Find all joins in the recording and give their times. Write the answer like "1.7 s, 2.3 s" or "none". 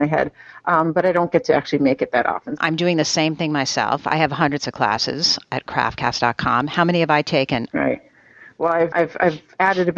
2.6 s, 7.7 s, 8.9 s